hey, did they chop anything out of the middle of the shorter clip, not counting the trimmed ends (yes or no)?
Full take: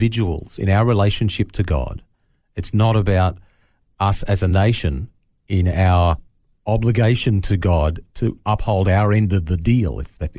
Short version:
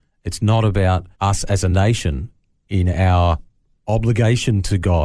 yes